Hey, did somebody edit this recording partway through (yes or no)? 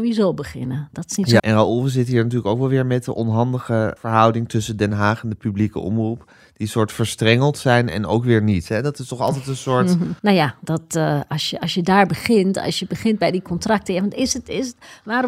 yes